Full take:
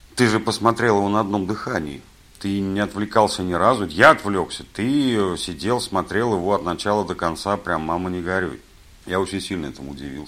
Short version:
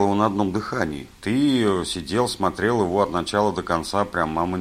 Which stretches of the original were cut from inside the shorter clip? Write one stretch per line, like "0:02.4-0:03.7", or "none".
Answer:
0:02.1-0:04.7